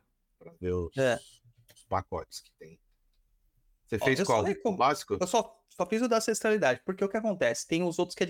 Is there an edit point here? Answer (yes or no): no